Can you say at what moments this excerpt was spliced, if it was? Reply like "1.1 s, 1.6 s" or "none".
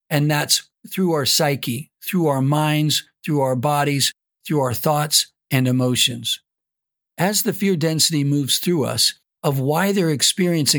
9.3 s